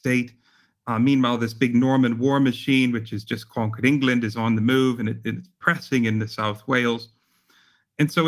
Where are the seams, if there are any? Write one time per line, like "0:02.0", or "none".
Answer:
none